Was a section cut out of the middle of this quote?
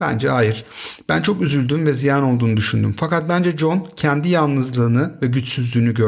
no; 0 cuts

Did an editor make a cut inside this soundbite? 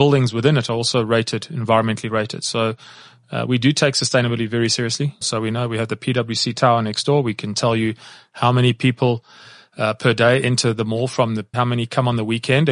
yes; 2 cuts; at 5.2 s, 11.5 s

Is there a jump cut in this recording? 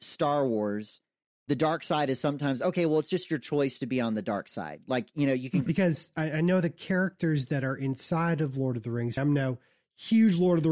yes; 2 cuts; at 5.7 s, 9.2 s

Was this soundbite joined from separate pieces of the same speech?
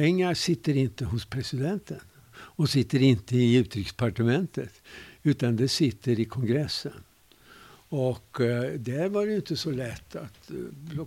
no; 0 cuts

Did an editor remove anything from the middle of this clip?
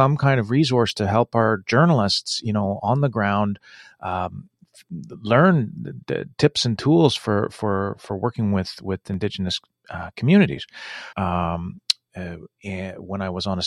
yes; 1 cut; at 11.1 s

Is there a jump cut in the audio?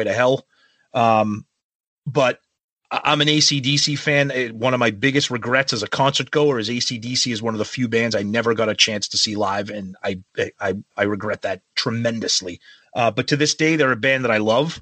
yes; 1 cut; at 12.8 s

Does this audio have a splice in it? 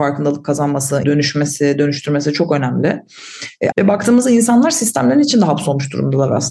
yes; 2 cuts; at 1.0 s, 3.7 s

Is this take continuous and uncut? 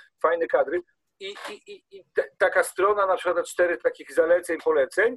yes; 0 cuts

